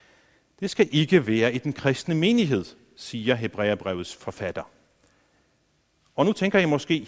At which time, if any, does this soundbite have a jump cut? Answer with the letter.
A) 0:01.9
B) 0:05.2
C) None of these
C